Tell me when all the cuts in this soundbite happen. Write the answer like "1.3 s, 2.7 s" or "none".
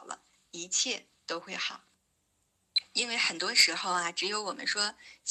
none